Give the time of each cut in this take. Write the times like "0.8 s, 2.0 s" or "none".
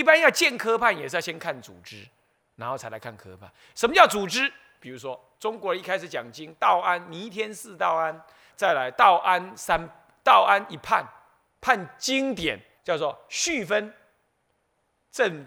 8.5 s, 12.8 s